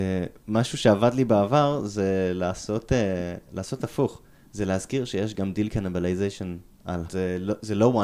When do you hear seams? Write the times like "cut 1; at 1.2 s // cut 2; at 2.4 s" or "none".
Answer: cut 1; at 7.1 s